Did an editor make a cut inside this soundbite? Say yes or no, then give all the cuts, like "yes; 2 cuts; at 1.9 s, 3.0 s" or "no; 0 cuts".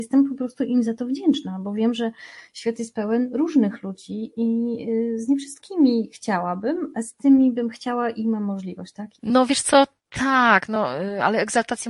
yes; 1 cut; at 9.2 s